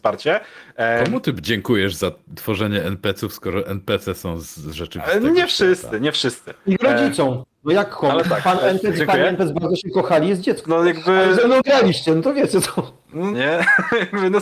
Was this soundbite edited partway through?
yes; 2 cuts; at 10.6 s, 13.3 s

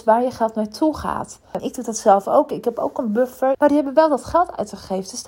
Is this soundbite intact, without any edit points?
no; 2 cuts; at 1.6 s, 3.5 s

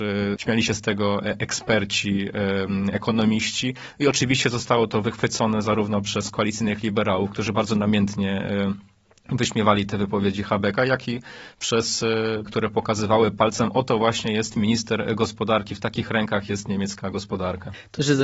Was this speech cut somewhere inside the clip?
yes; 1 cut; at 12.5 s

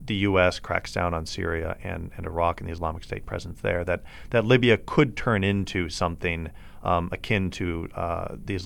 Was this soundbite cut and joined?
no; 0 cuts

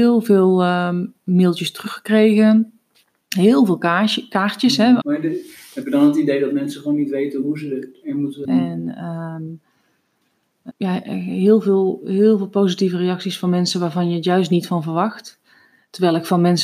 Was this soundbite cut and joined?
yes; 3 cuts; at 5.0 s, 8.4 s, 10.7 s

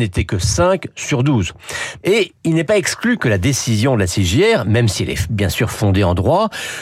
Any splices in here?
yes; 1 cut; at 2.0 s

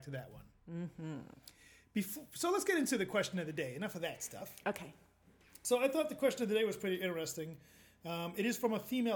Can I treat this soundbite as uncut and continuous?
yes; 0 cuts

